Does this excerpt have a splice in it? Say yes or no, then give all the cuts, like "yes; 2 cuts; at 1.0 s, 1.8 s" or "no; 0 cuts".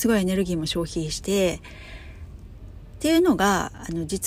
yes; 1 cut; at 1.2 s